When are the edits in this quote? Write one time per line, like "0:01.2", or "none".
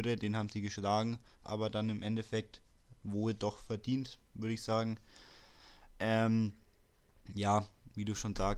0:01.4